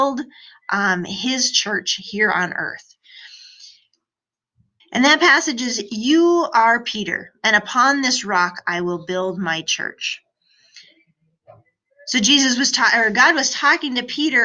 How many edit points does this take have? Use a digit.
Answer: 1